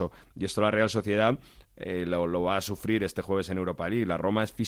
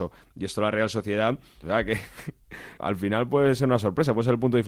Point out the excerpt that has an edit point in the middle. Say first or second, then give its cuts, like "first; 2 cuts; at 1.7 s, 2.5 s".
second; 2 cuts; at 1.6 s, 2.8 s